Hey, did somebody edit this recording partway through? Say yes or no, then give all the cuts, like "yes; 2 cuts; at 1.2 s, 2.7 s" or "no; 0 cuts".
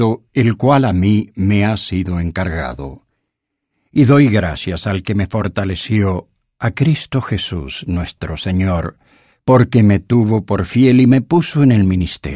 no; 0 cuts